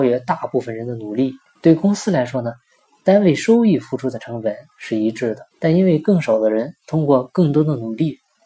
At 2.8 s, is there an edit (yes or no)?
no